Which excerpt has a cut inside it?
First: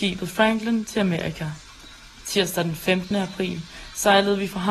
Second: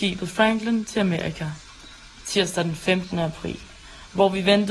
second; 1 cut; at 3.1 s

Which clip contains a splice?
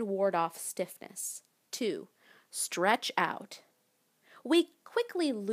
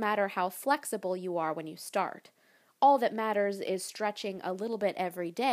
first; 1 cut; at 1.6 s

